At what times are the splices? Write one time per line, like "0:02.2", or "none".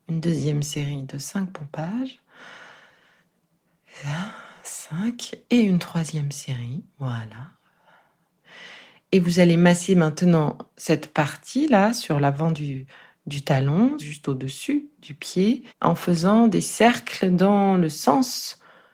0:14.0
0:15.7